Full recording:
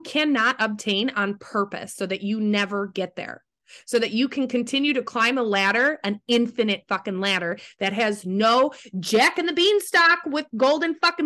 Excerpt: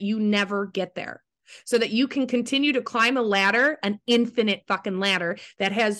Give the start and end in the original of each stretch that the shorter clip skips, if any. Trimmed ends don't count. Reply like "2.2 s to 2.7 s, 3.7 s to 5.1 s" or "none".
none